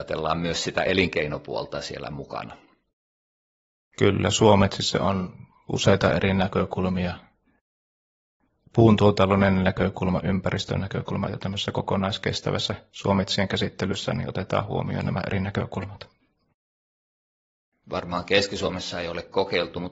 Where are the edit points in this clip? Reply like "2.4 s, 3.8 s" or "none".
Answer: 11.3 s, 17.7 s